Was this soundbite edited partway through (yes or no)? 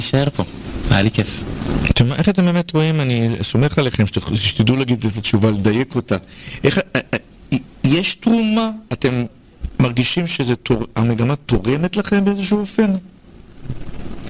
yes